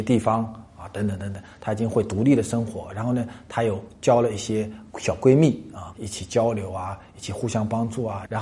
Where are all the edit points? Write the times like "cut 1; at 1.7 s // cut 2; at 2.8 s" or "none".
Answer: cut 1; at 5.9 s